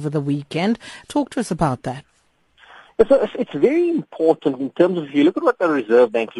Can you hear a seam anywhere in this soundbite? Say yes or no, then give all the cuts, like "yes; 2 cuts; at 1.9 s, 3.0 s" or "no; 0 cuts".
no; 0 cuts